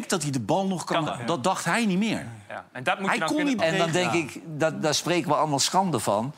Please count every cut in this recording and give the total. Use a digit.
2